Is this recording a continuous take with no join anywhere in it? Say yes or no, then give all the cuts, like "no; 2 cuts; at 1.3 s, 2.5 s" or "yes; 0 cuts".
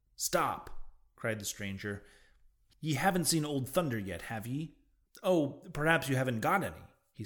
no; 2 cuts; at 2.7 s, 5.1 s